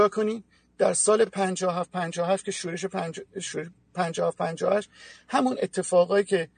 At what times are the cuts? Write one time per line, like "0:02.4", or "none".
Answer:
none